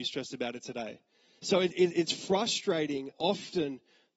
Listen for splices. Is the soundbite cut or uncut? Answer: cut